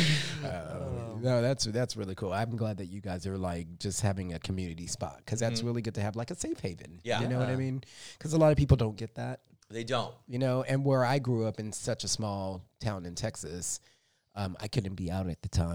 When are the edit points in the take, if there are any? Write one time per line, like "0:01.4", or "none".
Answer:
none